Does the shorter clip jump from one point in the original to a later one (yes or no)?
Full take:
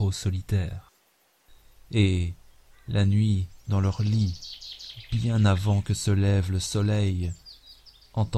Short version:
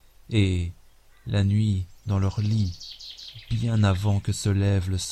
no